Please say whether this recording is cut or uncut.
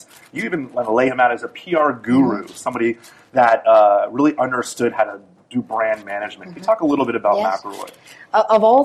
uncut